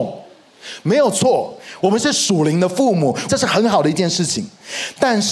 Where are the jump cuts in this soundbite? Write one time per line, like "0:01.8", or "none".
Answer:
0:01.8
0:03.3

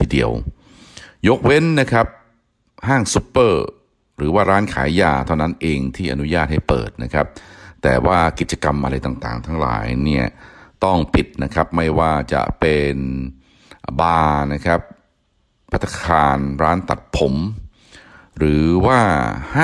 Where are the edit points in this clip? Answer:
none

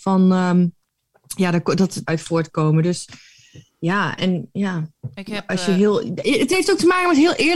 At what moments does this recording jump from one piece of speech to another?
0:02.1

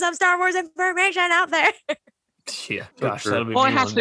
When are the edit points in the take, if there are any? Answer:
0:02.9

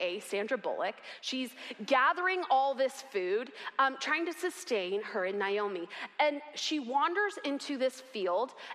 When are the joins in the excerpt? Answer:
none

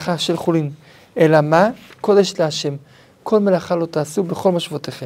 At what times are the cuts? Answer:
0:01.9

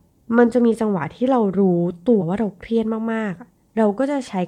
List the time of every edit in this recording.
0:02.2

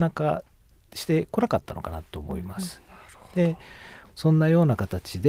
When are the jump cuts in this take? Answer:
0:04.0

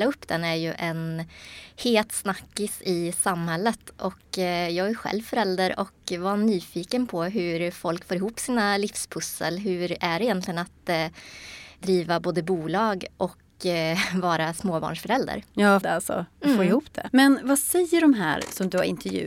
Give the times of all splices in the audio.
0:15.8
0:17.1

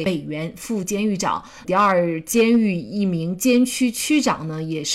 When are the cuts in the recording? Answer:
0:01.6

